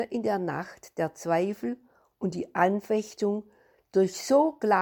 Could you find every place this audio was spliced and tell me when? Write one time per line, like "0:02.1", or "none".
none